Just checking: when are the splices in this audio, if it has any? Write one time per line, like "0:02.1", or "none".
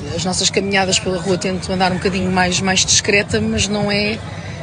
none